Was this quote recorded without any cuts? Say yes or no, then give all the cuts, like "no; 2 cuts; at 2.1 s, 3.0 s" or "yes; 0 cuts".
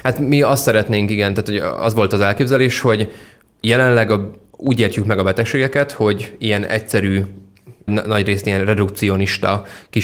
no; 1 cut; at 7.9 s